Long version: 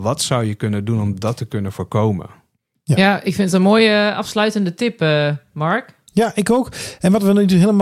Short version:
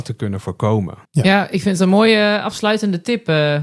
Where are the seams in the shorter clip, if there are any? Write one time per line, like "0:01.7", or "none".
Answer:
0:01.1

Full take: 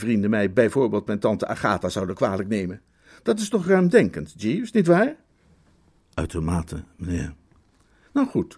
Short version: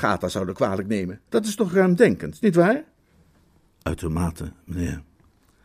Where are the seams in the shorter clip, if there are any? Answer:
0:01.3
0:02.4

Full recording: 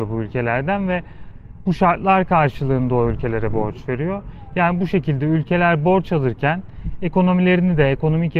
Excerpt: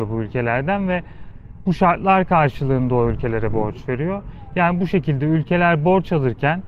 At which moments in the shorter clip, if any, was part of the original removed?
none

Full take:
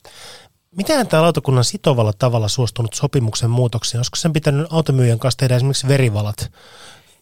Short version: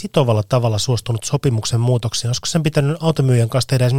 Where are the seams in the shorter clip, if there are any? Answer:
none

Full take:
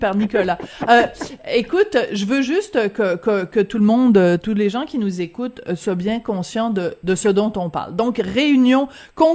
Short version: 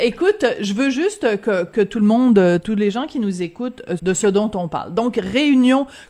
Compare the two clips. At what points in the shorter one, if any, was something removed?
0:01.7
0:04.0

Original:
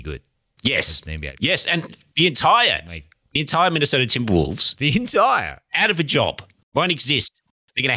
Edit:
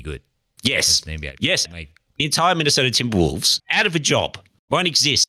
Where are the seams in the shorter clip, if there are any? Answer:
0:01.7
0:03.6

